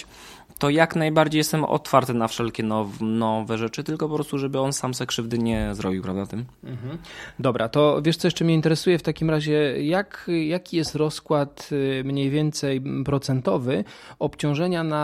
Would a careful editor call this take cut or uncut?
uncut